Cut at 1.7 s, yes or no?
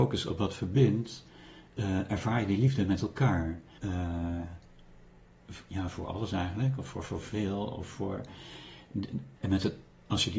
no